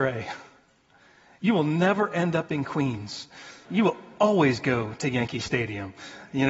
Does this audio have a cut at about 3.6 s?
yes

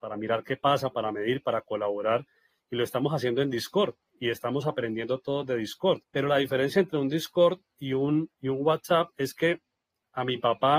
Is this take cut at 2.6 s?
no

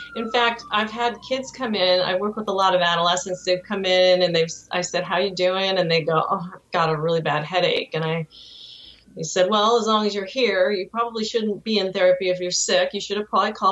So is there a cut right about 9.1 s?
no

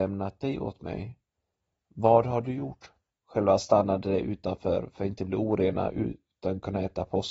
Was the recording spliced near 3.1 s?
yes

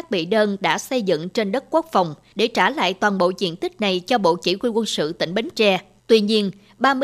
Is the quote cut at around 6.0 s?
yes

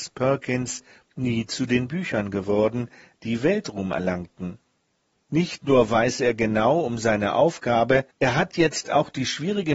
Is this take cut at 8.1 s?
yes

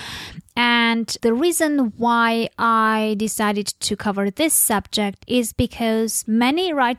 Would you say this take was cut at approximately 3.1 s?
no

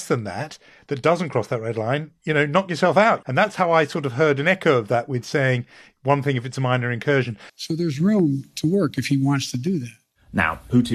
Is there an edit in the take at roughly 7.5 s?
yes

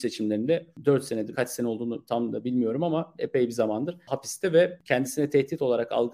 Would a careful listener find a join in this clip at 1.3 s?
yes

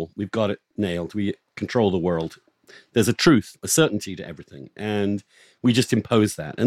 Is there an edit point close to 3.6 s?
no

